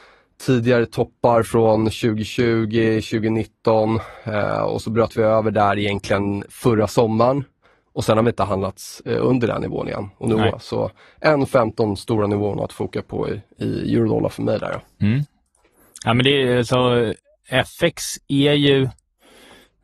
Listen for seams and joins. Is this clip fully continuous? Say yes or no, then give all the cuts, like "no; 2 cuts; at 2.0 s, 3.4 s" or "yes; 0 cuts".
no; 1 cut; at 10.5 s